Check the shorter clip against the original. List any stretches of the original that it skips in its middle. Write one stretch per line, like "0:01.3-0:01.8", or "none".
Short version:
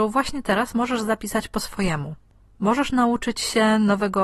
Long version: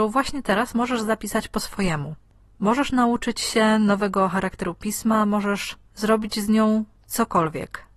none